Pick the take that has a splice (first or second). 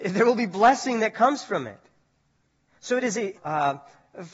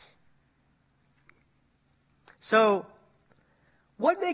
first